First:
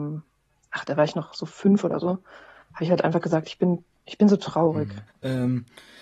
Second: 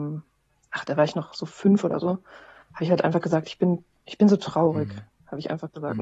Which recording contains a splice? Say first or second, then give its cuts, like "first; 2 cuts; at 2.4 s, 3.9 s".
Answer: first; 1 cut; at 5.1 s